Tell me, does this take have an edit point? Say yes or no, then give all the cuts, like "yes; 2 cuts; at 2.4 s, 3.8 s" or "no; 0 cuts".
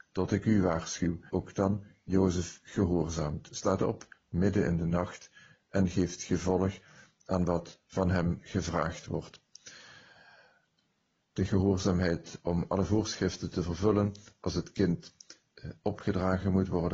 yes; 2 cuts; at 1.3 s, 11.2 s